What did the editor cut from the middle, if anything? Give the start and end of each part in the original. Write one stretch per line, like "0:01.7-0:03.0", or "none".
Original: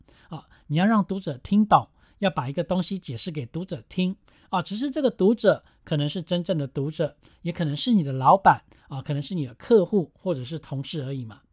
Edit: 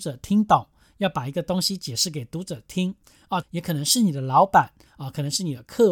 0:04.6-0:07.3